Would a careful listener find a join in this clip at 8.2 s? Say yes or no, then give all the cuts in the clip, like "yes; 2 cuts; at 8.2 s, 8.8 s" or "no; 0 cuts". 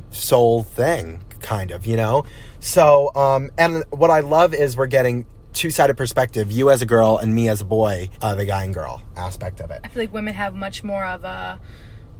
yes; 1 cut; at 8.2 s